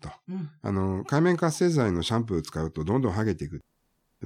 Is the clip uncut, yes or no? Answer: yes